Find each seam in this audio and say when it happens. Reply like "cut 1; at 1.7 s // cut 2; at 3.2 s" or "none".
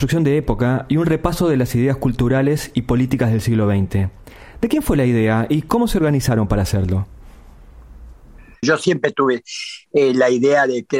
cut 1; at 8.6 s